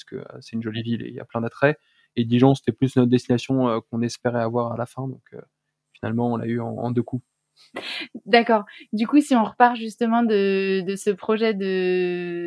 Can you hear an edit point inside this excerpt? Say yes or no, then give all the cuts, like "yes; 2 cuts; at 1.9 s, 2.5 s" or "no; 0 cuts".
no; 0 cuts